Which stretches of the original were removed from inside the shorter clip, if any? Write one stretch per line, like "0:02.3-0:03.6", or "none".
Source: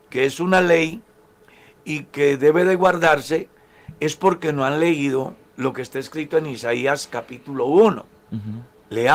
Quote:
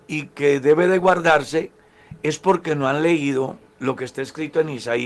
none